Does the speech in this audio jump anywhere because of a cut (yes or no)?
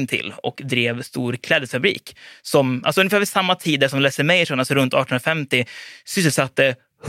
no